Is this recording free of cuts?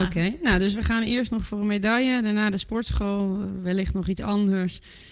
yes; 0 cuts

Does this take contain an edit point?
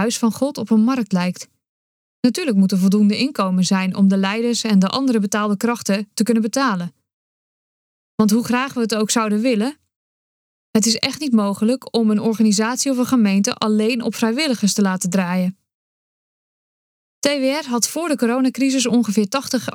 no; 0 cuts

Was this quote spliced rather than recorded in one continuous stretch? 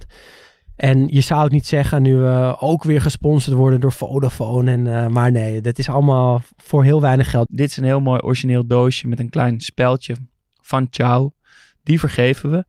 yes; 1 cut; at 7.5 s

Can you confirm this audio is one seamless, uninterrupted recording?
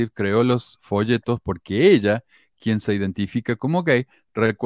yes; 0 cuts

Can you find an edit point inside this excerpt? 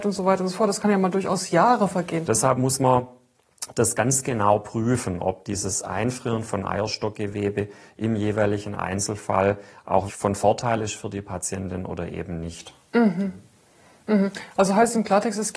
yes; 2 cuts; at 2.2 s, 10.1 s

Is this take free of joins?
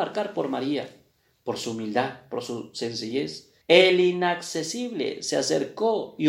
no; 1 cut; at 3.6 s

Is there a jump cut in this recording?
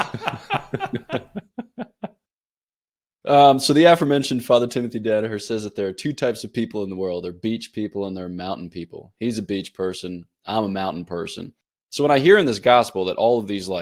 no; 0 cuts

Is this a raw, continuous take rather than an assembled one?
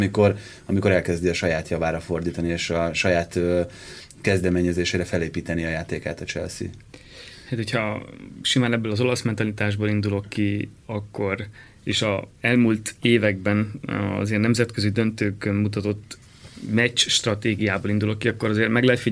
yes; 0 cuts

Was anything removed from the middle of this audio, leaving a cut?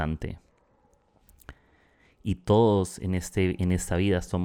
no; 0 cuts

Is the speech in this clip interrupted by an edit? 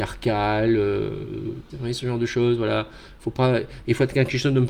yes; 1 cut; at 1.7 s

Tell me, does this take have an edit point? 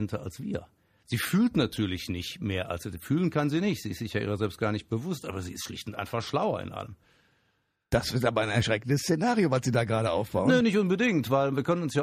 no; 0 cuts

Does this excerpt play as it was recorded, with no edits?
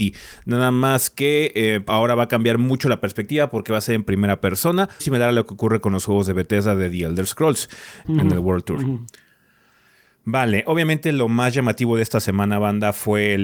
no; 3 cuts; at 1.9 s, 5.0 s, 8.0 s

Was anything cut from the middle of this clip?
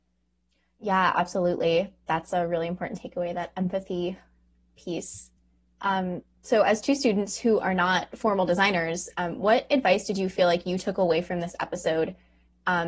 no; 0 cuts

